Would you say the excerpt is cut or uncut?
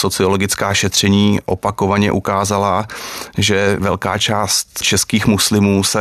uncut